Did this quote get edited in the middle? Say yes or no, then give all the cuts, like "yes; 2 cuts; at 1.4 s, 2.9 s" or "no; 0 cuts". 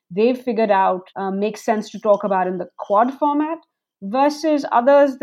yes; 1 cut; at 1.1 s